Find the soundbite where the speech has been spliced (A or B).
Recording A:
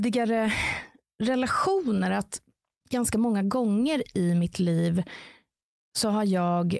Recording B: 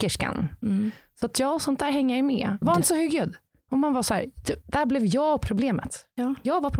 B